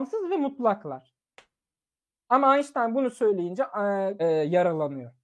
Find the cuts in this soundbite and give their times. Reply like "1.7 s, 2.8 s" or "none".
4.2 s